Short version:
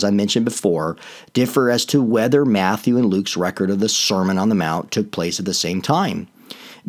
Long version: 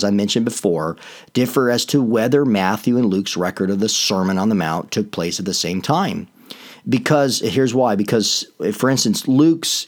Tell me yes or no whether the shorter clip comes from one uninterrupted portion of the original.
yes